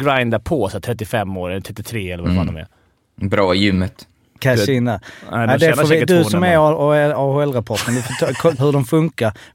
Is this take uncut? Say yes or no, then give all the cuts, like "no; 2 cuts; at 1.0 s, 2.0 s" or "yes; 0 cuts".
no; 2 cuts; at 4.4 s, 8.6 s